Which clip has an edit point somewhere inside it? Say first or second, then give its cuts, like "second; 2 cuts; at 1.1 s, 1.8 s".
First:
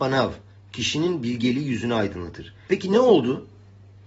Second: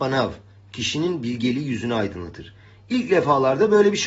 first; 1 cut; at 2.7 s